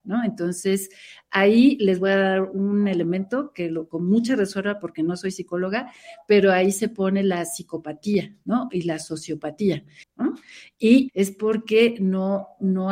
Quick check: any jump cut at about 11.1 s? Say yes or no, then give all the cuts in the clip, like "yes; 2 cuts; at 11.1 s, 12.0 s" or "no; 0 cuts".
yes; 2 cuts; at 10.0 s, 11.1 s